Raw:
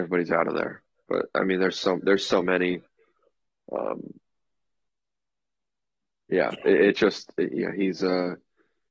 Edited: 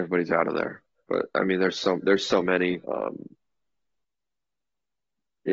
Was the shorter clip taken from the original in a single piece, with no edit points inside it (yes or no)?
no